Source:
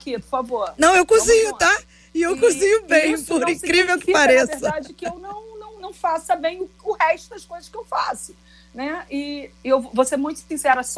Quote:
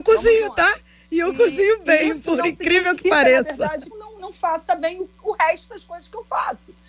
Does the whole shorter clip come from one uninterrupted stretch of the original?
no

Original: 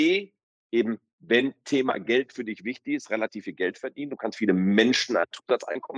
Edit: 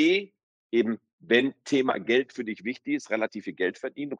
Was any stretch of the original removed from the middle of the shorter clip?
no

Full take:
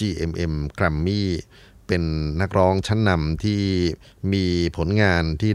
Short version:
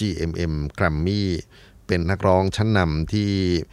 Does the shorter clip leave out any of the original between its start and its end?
yes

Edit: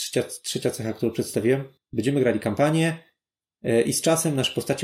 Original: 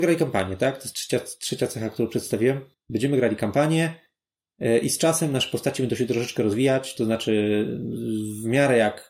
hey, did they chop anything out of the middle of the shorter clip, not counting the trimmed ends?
no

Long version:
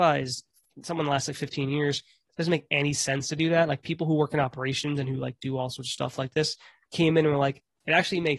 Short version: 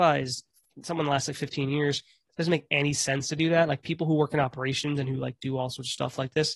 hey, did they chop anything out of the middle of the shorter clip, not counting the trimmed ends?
no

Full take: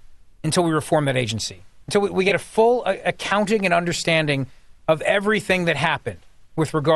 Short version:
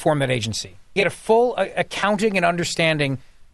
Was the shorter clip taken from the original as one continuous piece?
no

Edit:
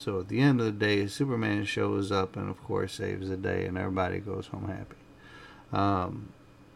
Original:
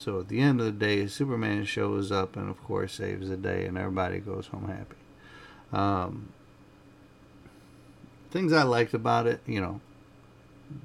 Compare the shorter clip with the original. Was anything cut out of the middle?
no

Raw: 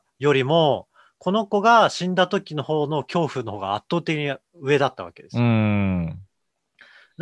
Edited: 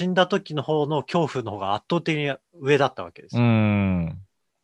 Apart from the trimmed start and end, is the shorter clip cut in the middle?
no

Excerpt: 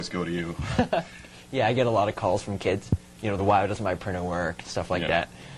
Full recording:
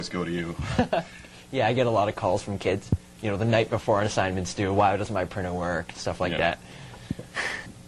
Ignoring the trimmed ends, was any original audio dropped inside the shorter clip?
yes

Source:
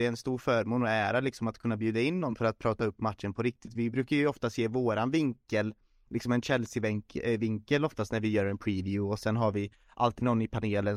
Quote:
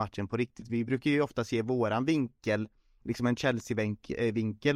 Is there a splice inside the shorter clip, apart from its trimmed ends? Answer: no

